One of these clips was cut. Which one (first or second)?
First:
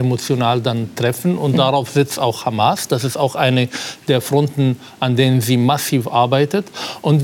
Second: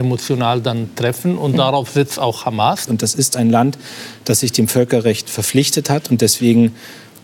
second